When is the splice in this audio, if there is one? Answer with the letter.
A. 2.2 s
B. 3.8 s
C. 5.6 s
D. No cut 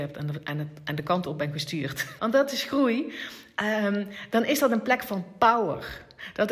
A